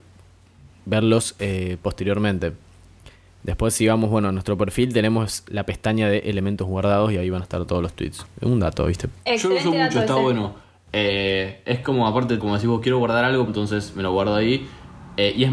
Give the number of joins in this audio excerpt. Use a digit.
2